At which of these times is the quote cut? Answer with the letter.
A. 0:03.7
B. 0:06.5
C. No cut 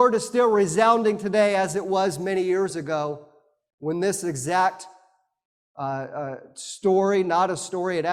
C